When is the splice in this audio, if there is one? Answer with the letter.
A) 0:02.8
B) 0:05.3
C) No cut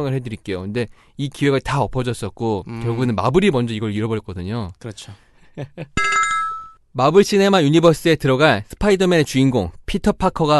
B